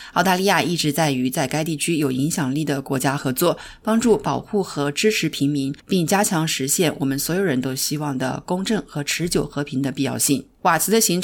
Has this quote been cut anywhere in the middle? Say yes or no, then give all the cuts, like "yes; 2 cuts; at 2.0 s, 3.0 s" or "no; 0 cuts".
yes; 1 cut; at 5.8 s